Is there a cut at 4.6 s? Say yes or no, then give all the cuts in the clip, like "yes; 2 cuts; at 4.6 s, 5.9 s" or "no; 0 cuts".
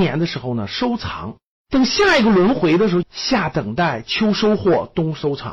no; 2 cuts; at 1.5 s, 3.0 s